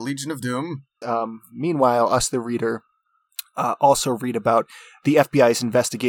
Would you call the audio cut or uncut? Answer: cut